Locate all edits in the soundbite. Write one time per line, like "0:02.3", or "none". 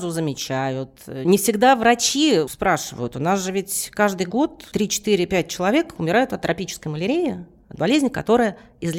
none